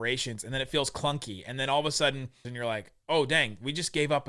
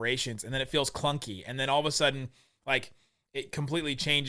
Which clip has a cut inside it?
first; 1 cut; at 2.4 s

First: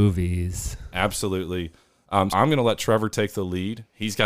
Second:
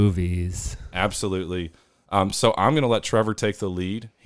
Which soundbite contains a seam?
first; 1 cut; at 2.3 s

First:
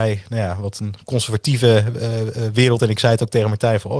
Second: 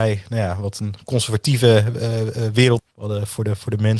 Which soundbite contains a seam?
second; 1 cut; at 2.8 s

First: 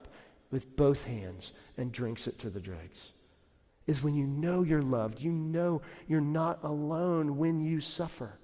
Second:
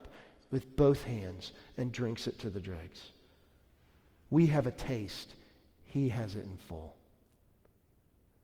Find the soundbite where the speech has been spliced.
first; 2 cuts; at 3.7 s, 5.2 s

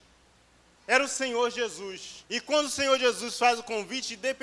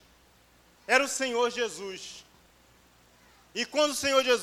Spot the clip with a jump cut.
first; 1 cut; at 2.2 s

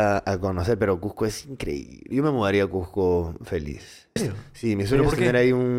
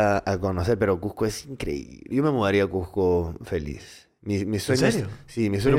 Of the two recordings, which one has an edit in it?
first; 1 cut; at 4.2 s

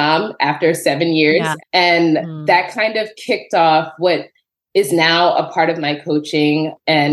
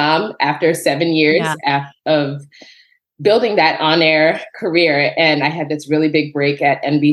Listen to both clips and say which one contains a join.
first; 1 cut; at 1.6 s

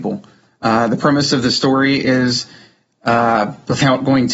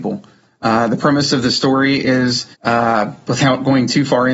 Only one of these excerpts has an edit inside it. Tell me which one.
second; 1 cut; at 2.5 s

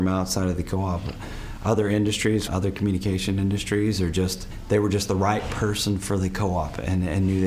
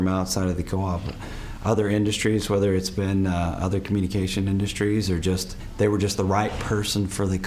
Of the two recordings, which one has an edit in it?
first; 1 cut; at 2.5 s

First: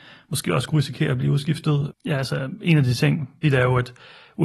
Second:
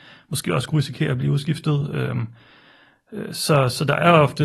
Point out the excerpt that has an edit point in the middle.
first; 2 cuts; at 1.9 s, 3.4 s

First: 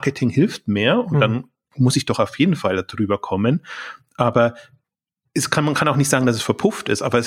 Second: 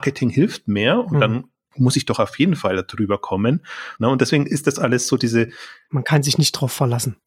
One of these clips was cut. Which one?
second; 1 cut; at 4.0 s

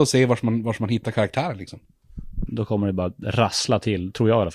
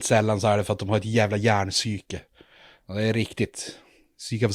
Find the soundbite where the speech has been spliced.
first; 1 cut; at 2.5 s

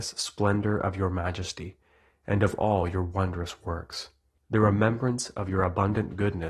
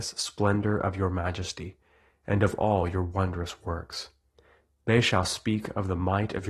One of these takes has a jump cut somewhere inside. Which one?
first; 1 cut; at 4.4 s

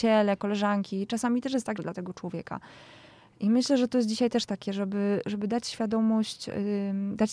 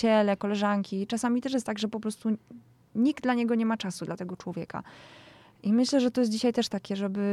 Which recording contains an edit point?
first; 1 cut; at 1.8 s

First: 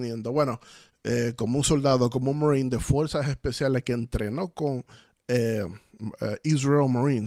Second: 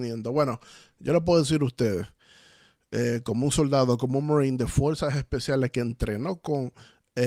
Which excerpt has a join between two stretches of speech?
first; 1 cut; at 0.9 s

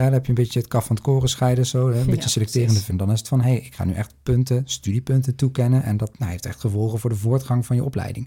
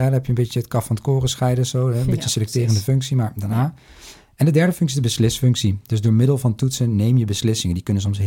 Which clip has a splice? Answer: first; 1 cut; at 2.9 s

